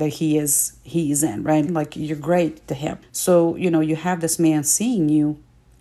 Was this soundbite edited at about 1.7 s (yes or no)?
yes